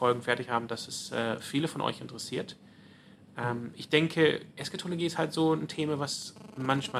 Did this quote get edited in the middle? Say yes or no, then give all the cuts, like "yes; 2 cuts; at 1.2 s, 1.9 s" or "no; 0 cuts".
no; 0 cuts